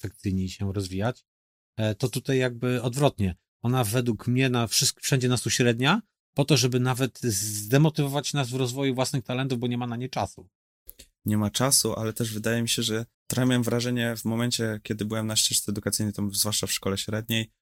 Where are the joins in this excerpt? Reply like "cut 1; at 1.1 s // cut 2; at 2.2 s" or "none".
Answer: cut 1; at 13.1 s